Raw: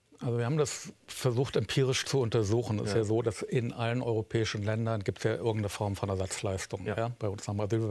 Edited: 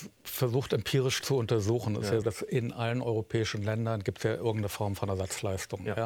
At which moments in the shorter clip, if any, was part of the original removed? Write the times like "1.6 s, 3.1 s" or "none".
2.2 s